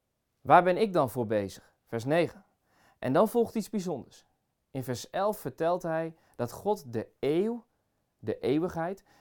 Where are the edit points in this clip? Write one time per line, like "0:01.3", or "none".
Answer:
none